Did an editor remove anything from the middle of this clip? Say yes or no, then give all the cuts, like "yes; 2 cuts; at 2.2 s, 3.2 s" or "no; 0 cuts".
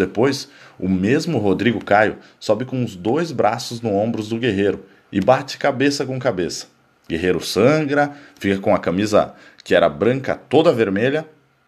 no; 0 cuts